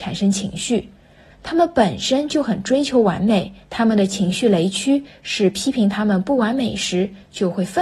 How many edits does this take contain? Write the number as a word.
two